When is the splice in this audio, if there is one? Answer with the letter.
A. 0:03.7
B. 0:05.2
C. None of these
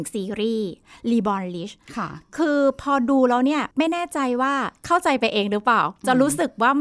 A